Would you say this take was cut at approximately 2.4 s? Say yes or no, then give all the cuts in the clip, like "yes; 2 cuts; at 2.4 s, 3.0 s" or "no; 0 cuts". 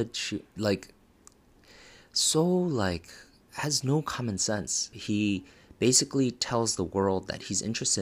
no; 1 cut; at 4.9 s